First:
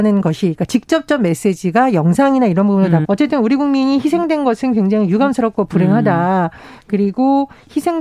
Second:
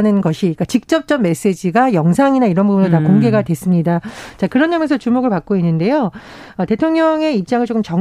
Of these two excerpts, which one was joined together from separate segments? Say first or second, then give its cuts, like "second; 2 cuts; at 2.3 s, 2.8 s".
first; 1 cut; at 3.0 s